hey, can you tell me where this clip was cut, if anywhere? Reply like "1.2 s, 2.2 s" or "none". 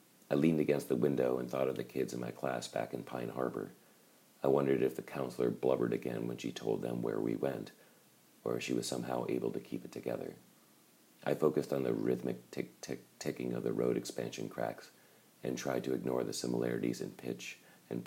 none

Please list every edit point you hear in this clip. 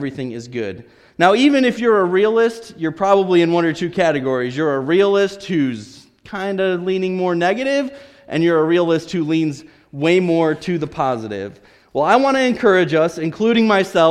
none

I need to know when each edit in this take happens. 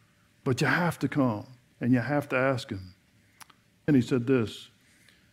3.9 s

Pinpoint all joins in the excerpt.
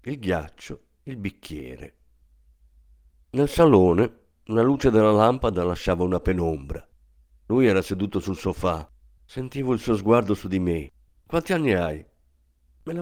9.2 s, 11.1 s

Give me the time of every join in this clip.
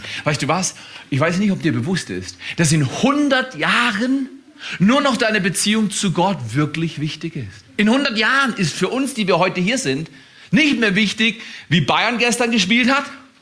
none

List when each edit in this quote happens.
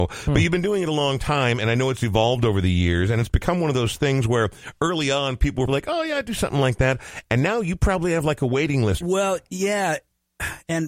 5.7 s, 9.0 s

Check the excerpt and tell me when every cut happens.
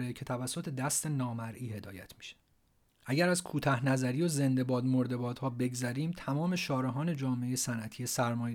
2.9 s

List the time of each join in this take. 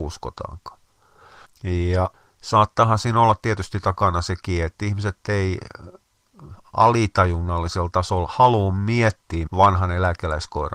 1.4 s, 9.5 s

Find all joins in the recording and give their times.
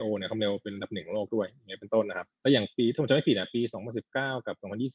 2.3 s

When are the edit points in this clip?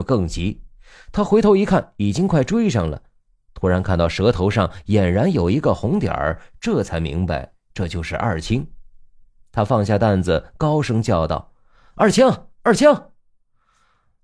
none

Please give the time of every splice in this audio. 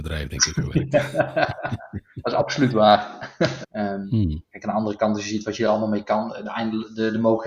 3.6 s

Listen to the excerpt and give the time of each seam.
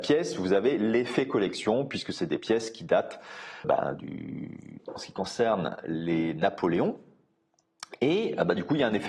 3.6 s, 4.8 s

